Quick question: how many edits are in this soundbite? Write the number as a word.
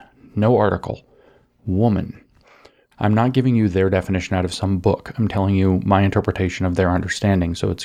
one